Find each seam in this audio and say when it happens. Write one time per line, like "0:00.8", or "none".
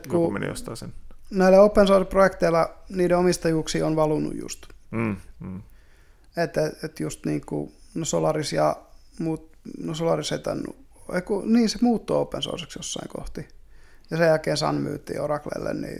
0:05.3